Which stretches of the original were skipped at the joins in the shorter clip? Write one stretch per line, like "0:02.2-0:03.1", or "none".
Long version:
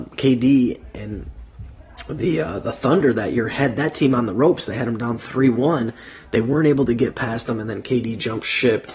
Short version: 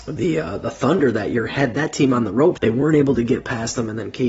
0:04.6-0:06.3